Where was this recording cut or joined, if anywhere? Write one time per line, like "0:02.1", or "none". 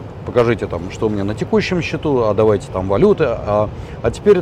none